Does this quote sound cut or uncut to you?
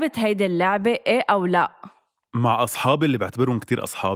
uncut